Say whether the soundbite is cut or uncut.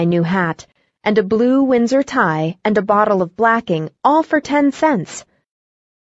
uncut